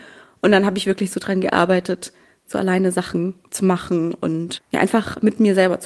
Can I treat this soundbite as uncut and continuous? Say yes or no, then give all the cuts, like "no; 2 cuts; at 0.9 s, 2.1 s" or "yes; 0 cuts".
yes; 0 cuts